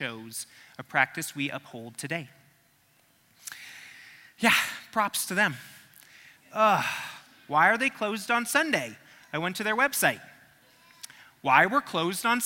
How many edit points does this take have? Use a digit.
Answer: 1